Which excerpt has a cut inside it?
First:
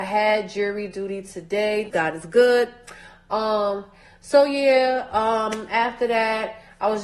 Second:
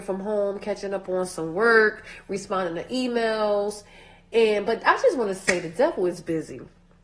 first; 1 cut; at 1.9 s

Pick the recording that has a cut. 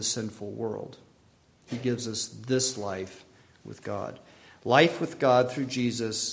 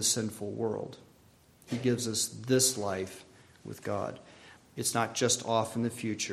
second; 1 cut; at 4.6 s

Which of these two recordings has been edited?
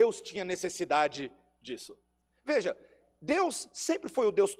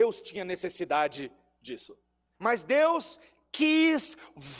second; 1 cut; at 2.3 s

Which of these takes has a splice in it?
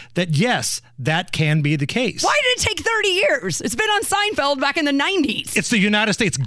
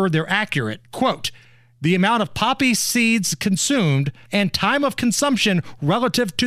second; 1 cut; at 4.3 s

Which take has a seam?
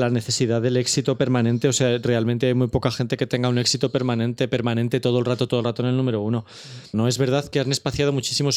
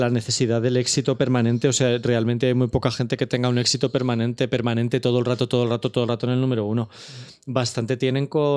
first; 2 cuts; at 5.5 s, 6.9 s

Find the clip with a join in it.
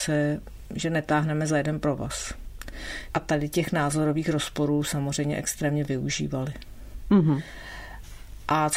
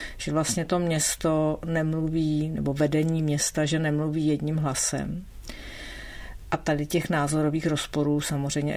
first; 1 cut; at 3.1 s

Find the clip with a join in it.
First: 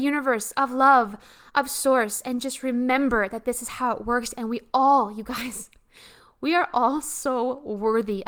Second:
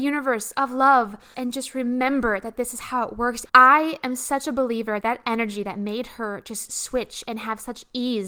second; 3 cuts; at 1.3 s, 3.5 s, 5.0 s

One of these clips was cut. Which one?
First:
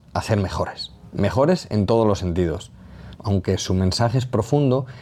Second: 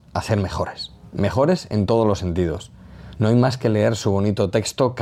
first; 1 cut; at 3.2 s

